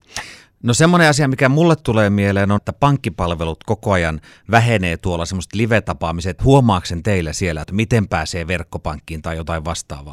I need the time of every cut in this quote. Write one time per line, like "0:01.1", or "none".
0:02.6
0:06.4
0:07.6